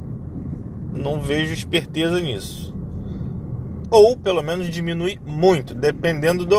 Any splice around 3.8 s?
yes; 1 cut; at 3.8 s

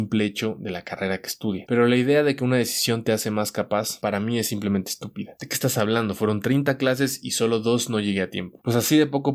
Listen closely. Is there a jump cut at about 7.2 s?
no; 2 cuts; at 1.7 s, 5.4 s

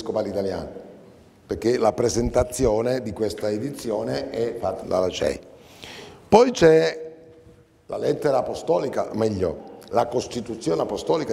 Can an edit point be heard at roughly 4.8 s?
yes; 1 cut; at 4.8 s

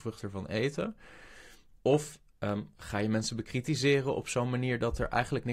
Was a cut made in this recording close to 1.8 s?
yes; 1 cut; at 1.8 s

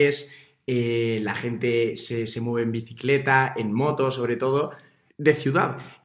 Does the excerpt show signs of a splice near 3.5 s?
no; 1 cut; at 5.1 s

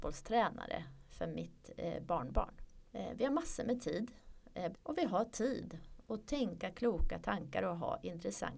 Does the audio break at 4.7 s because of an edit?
yes; 2 cuts; at 2.9 s, 4.7 s

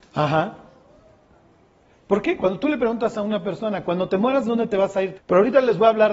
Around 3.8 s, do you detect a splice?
no; 1 cut; at 5.1 s

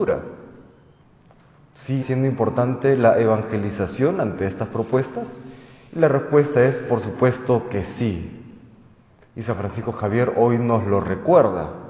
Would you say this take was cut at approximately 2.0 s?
yes; 1 cut; at 2.0 s

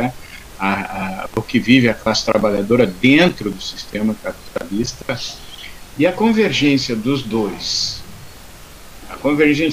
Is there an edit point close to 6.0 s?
yes; 1 cut; at 6.0 s

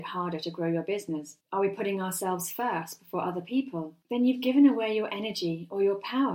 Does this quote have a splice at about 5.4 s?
no; 2 cuts; at 1.4 s, 4.0 s

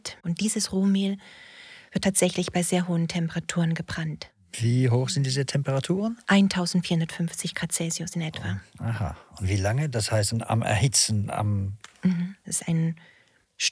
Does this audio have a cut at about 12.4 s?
yes; 2 cuts; at 10.3 s, 12.4 s

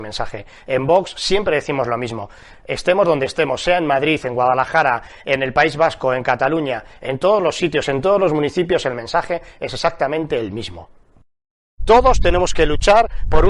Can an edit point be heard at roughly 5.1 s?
no; 0 cuts

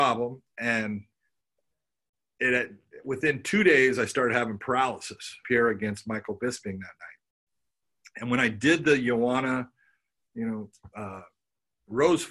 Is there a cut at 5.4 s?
yes; 1 cut; at 5.4 s

